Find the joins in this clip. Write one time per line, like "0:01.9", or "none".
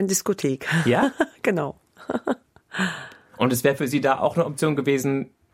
none